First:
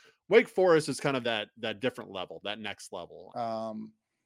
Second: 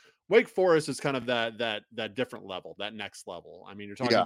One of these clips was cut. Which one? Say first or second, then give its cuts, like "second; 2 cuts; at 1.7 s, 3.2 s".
first; 2 cuts; at 1.2 s, 3.3 s